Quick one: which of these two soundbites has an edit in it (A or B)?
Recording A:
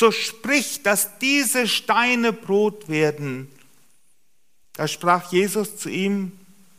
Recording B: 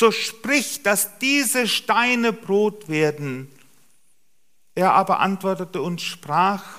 A